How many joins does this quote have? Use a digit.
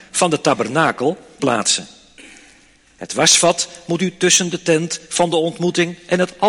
1